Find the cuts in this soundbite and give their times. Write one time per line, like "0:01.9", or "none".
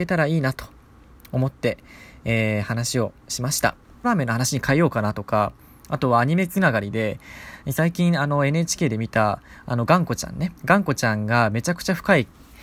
0:04.0
0:10.6